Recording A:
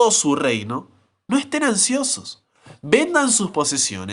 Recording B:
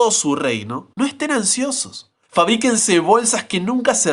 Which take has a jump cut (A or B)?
B